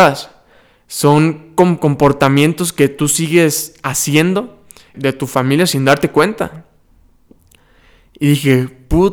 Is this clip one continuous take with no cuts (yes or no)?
no